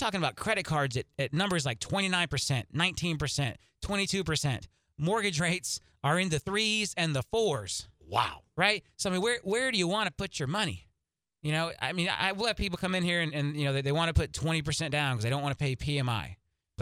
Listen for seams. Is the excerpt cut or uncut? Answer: uncut